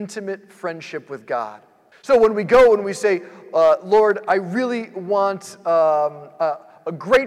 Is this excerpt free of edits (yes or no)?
no